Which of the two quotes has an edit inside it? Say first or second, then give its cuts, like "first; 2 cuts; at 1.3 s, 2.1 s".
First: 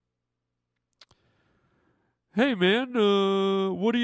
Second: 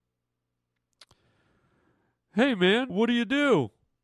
second; 1 cut; at 2.9 s